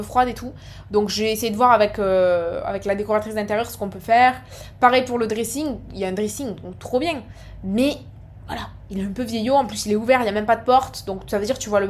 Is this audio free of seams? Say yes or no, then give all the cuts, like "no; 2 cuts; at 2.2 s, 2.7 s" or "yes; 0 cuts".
yes; 0 cuts